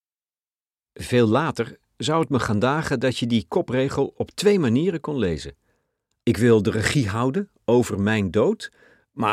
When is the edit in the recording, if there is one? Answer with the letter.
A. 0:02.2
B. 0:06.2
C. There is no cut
B